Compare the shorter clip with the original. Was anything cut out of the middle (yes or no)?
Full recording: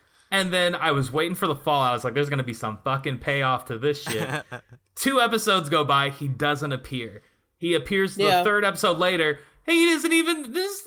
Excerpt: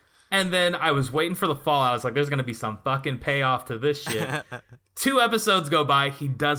no